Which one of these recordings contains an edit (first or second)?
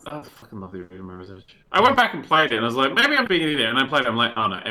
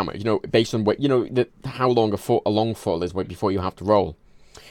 first